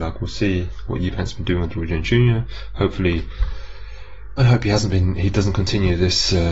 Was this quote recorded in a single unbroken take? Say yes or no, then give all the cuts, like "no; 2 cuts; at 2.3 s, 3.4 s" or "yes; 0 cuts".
no; 1 cut; at 4.4 s